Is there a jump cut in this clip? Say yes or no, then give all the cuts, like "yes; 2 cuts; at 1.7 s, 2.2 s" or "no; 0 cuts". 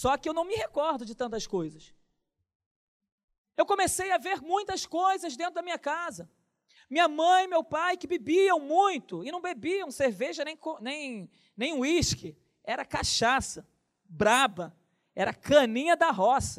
no; 0 cuts